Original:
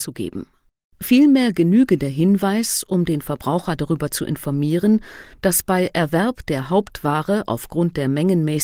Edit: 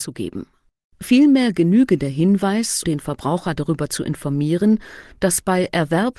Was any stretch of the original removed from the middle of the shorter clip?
yes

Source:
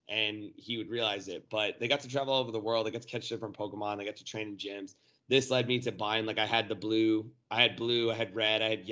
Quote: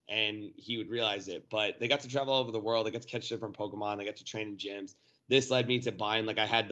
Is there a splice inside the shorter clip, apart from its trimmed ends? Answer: no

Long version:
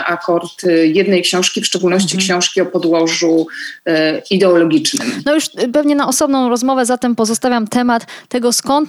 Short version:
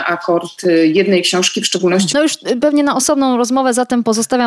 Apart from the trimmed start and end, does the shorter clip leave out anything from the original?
yes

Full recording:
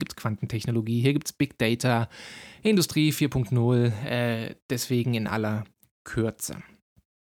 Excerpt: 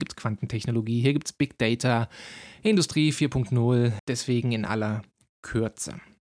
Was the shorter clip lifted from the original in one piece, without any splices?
no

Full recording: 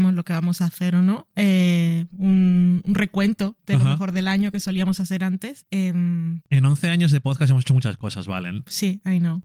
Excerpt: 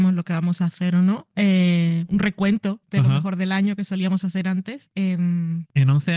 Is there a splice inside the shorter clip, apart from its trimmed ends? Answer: yes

